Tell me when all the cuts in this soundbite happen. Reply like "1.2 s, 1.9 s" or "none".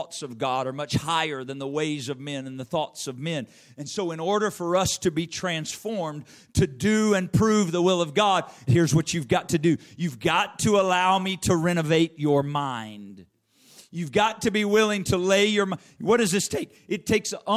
8.7 s